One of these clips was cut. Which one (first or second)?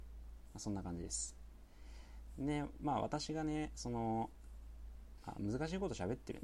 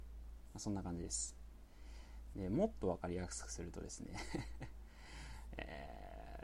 second